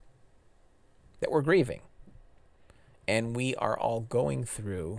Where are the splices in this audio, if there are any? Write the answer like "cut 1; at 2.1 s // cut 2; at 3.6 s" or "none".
none